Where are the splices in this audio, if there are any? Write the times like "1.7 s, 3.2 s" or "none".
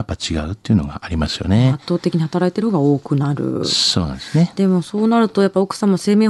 none